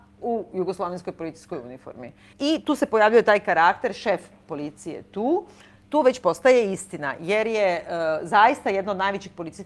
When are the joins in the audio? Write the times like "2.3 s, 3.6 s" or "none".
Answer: 2.3 s